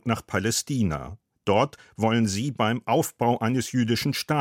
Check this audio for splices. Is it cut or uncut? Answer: uncut